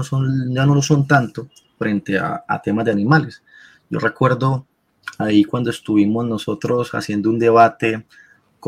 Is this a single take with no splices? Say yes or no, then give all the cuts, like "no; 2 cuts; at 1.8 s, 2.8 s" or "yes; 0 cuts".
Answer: yes; 0 cuts